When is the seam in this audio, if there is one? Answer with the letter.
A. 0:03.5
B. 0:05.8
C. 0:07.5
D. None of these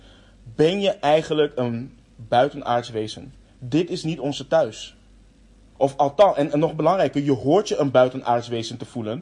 B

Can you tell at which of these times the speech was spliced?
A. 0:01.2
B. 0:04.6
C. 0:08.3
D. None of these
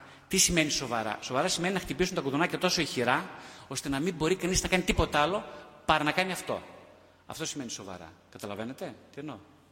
D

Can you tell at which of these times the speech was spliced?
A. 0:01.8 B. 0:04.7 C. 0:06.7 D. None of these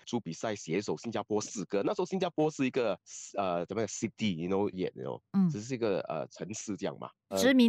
B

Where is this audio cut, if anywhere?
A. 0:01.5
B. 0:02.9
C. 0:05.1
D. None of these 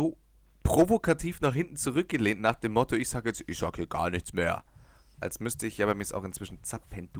C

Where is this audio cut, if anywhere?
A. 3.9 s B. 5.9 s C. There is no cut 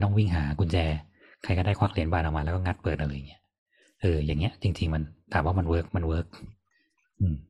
B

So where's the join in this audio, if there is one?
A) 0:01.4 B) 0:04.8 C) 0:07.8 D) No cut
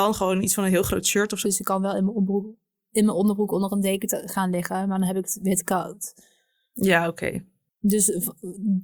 A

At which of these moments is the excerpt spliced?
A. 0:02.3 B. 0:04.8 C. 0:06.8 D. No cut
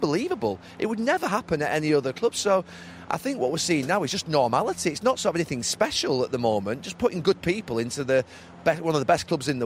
D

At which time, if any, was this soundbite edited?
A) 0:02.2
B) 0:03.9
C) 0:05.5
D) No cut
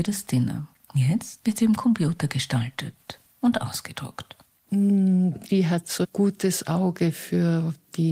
C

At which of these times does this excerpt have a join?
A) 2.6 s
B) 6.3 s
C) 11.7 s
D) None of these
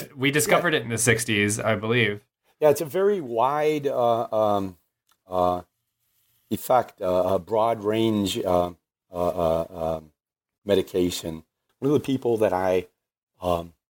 C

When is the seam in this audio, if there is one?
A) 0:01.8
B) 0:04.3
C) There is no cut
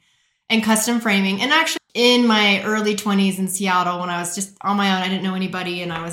A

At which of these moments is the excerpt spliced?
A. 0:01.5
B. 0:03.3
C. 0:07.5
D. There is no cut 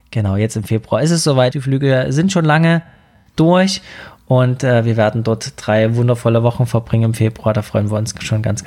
A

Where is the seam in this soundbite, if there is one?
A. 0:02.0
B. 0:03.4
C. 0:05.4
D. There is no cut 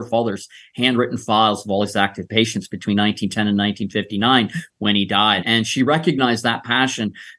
C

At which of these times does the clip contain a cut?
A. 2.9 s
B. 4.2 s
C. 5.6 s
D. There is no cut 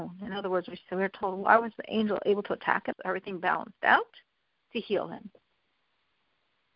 A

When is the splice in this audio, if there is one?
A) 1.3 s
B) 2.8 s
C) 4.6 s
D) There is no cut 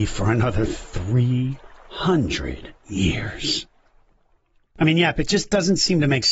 B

